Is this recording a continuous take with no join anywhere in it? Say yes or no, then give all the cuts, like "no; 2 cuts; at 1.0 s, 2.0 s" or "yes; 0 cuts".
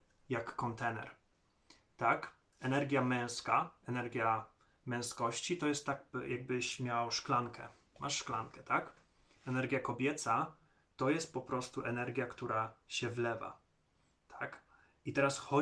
yes; 0 cuts